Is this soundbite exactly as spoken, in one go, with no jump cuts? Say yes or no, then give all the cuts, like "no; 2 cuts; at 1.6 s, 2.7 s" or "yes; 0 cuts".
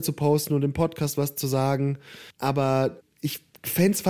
no; 1 cut; at 2.3 s